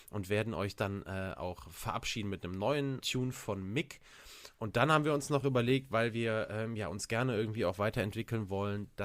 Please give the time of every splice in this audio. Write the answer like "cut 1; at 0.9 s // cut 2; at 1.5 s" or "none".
cut 1; at 3.0 s